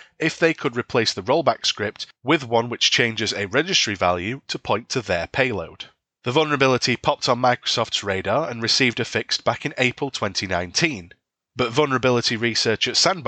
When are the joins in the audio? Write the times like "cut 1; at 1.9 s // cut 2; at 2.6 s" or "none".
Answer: none